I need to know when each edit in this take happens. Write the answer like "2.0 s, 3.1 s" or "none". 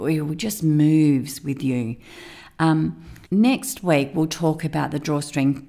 3.3 s